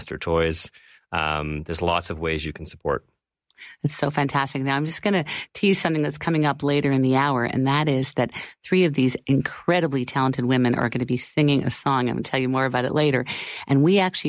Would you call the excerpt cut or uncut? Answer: uncut